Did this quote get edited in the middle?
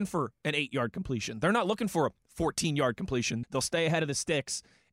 yes; 1 cut; at 3.4 s

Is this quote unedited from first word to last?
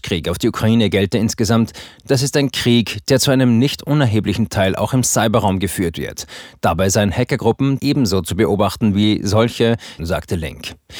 no; 2 cuts; at 7.8 s, 10.0 s

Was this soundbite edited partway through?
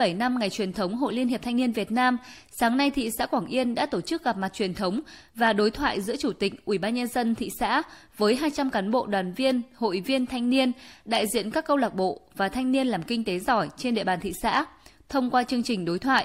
no; 0 cuts

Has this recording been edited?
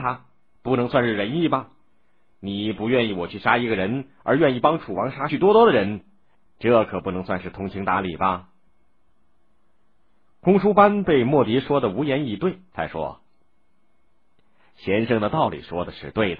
yes; 2 cuts; at 5.3 s, 12.7 s

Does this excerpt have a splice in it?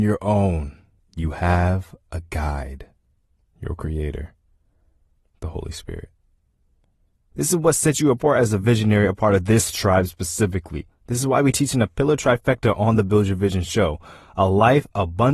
yes; 2 cuts; at 3.4 s, 7.3 s

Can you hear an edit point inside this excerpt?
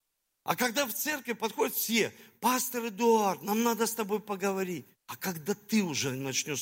no; 0 cuts

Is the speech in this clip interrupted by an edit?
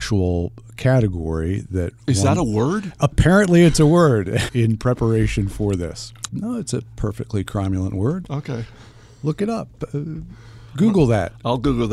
yes; 2 cuts; at 4.5 s, 6.3 s

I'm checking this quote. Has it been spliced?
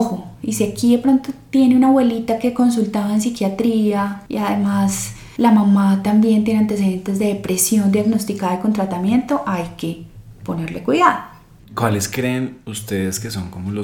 no; 0 cuts

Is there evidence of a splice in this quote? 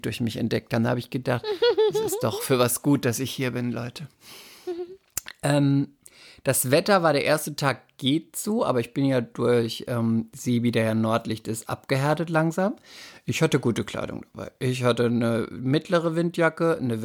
no; 0 cuts

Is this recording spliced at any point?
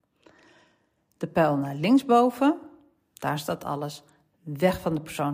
no; 0 cuts

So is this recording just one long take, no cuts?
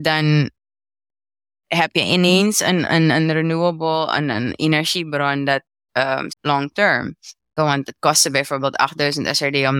no; 2 cuts; at 6.3 s, 7.6 s

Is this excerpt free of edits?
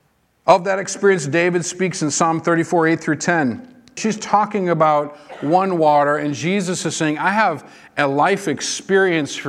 no; 1 cut; at 4.0 s

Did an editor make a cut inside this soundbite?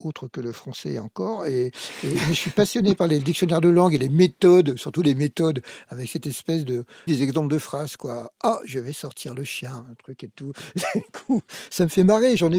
yes; 1 cut; at 7.1 s

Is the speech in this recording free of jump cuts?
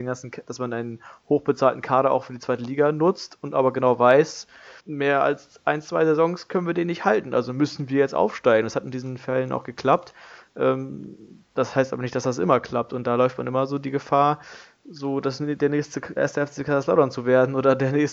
no; 2 cuts; at 4.8 s, 16.2 s

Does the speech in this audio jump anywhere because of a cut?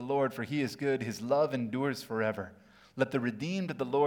no; 0 cuts

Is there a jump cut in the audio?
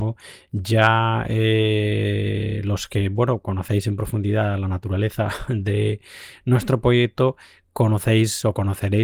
no; 0 cuts

